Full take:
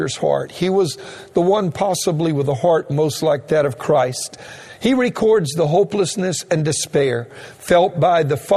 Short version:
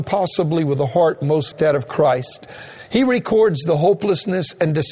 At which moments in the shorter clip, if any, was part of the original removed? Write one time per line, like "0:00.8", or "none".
0:01.5